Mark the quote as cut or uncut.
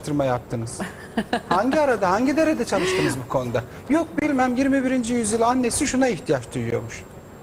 uncut